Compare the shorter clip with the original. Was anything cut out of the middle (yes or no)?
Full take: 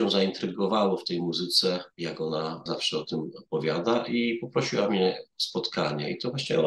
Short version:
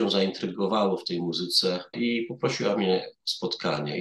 yes